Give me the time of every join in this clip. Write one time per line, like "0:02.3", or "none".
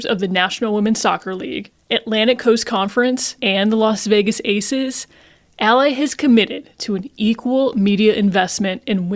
0:03.4